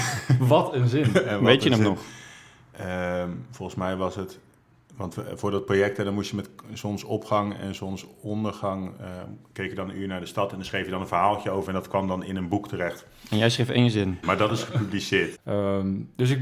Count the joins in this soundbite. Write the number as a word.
two